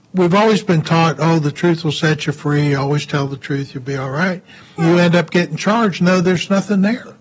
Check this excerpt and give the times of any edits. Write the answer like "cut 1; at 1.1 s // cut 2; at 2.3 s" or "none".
cut 1; at 4.8 s // cut 2; at 6.0 s